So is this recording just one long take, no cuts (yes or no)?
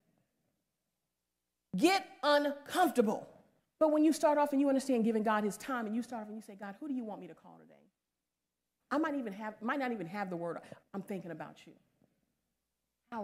no